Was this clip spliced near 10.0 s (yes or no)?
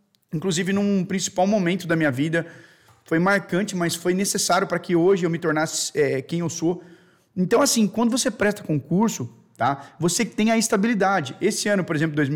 no